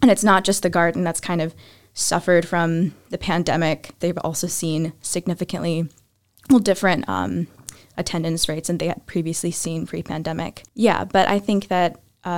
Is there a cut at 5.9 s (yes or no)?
no